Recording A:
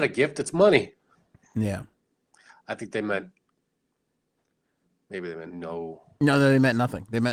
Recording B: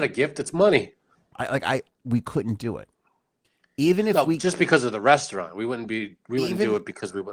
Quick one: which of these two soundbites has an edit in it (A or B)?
B